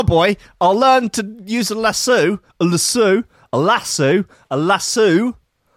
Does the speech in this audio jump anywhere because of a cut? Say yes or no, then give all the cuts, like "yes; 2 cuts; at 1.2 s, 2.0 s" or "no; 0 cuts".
no; 0 cuts